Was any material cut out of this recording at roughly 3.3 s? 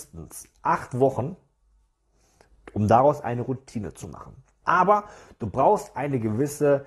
no; 1 cut; at 4.6 s

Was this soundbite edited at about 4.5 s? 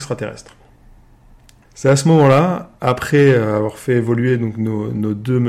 no; 2 cuts; at 1.6 s, 2.8 s

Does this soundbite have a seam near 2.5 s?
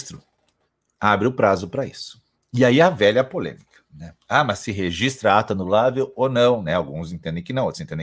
no; 0 cuts

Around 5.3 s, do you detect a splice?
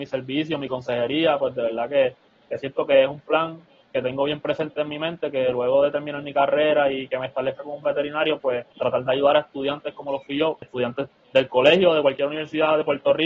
no; 2 cuts; at 8.7 s, 10.6 s

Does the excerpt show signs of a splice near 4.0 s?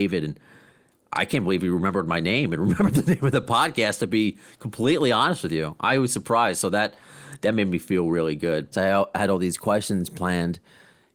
no; 1 cut; at 8.7 s

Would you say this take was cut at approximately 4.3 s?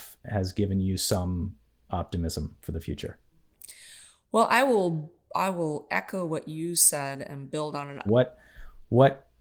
no; 1 cut; at 8.1 s

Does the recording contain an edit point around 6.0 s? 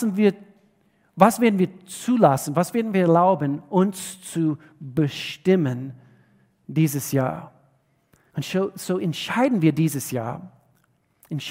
no; 1 cut; at 8.3 s

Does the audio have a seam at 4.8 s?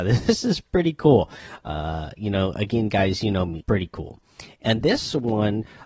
yes; 2 cuts; at 3.6 s, 4.8 s

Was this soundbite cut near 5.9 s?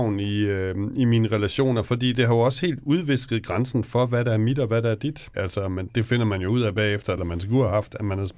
yes; 2 cuts; at 5.9 s, 7.2 s

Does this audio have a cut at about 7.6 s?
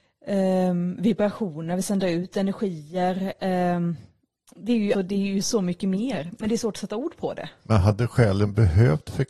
no; 1 cut; at 4.9 s

